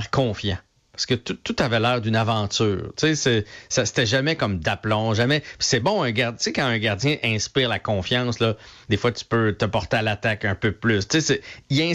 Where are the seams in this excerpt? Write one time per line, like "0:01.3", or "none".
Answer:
none